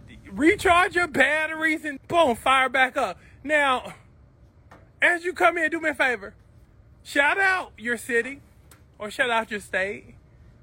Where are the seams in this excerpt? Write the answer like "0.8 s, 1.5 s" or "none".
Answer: 2.0 s

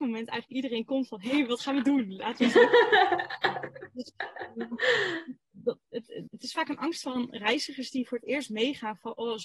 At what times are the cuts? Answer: 6.3 s

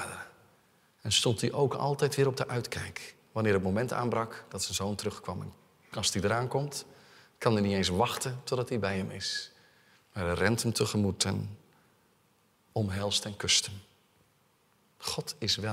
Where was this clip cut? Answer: none

